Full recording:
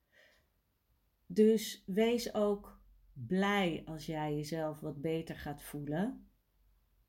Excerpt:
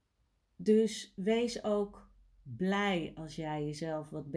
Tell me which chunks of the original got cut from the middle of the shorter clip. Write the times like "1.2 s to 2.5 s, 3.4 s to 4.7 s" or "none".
none